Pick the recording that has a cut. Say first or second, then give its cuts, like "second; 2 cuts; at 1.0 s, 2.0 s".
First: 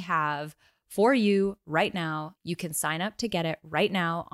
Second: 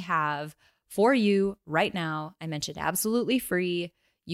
first; 1 cut; at 2.4 s